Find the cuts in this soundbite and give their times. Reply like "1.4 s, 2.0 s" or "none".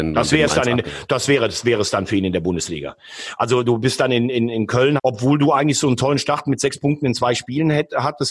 5.0 s